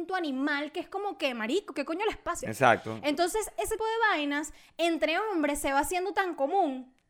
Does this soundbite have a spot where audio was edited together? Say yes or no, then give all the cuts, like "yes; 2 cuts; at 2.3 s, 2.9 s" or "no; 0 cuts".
yes; 2 cuts; at 2.4 s, 3.8 s